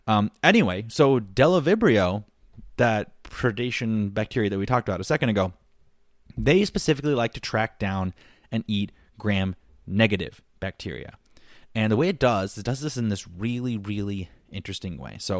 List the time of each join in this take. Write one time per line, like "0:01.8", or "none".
none